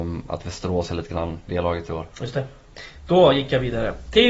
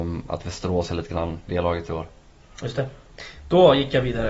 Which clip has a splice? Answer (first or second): first